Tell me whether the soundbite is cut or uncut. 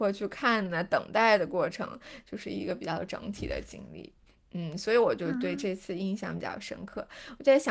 uncut